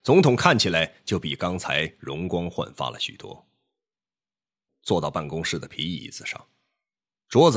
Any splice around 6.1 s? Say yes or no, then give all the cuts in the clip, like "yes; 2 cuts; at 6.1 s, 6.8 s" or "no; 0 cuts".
no; 1 cut; at 4.7 s